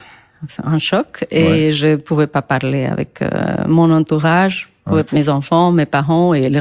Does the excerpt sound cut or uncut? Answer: cut